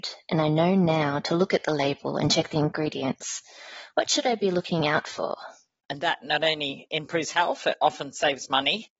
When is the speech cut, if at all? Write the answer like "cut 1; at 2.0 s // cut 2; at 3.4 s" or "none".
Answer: cut 1; at 5.8 s